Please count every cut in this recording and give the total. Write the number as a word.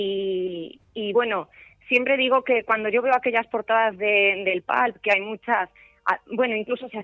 zero